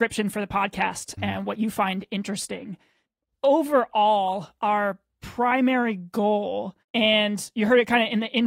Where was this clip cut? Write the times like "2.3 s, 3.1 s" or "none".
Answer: 1.2 s, 6.8 s